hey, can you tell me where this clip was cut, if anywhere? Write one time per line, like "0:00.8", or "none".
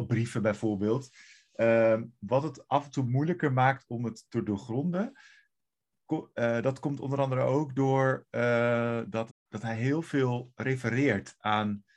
0:09.3